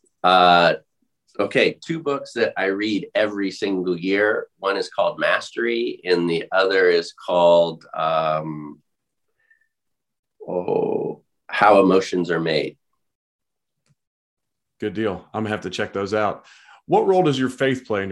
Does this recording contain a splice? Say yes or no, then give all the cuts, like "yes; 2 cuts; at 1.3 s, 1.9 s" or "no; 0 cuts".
no; 0 cuts